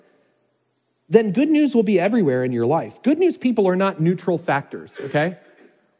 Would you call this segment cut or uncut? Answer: uncut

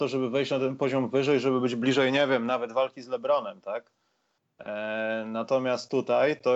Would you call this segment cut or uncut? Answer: uncut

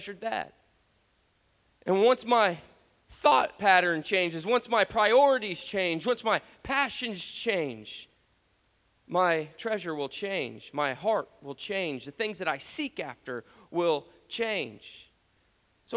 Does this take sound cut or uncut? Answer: uncut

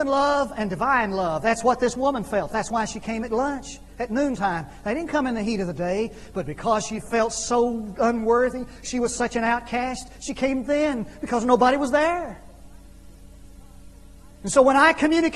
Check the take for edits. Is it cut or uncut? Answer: uncut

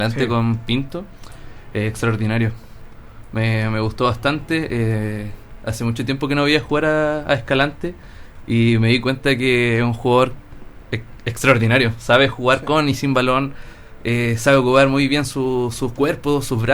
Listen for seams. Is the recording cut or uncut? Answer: uncut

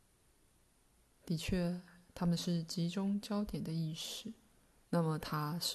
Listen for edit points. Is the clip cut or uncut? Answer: cut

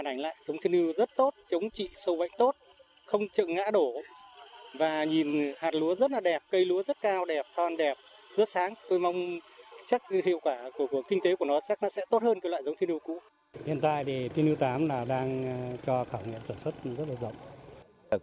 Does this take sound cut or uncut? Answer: uncut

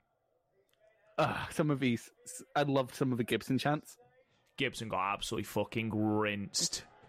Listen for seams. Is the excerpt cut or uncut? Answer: uncut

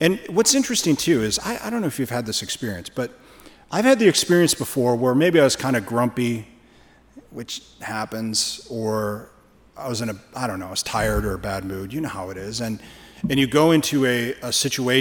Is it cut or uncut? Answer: uncut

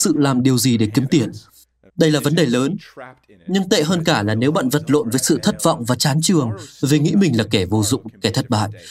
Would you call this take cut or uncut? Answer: cut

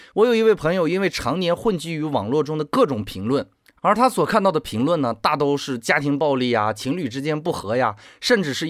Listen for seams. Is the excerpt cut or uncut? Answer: uncut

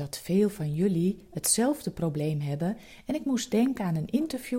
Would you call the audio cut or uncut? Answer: uncut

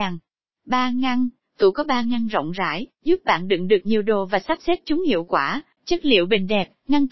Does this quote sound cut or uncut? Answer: cut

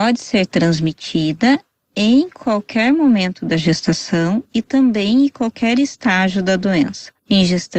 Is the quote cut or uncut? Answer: uncut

